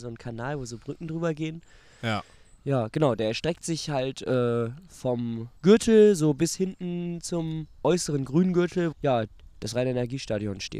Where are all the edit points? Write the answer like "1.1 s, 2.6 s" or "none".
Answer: 5.6 s, 8.9 s

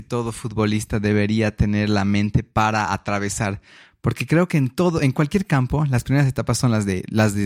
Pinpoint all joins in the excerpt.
none

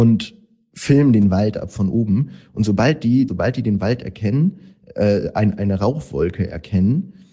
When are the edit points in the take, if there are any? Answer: 3.3 s

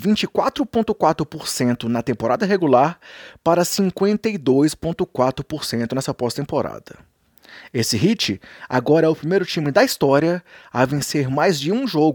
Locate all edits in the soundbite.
none

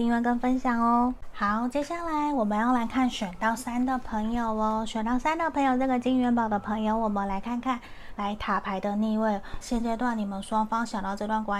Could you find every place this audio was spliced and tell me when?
8.2 s, 9.6 s

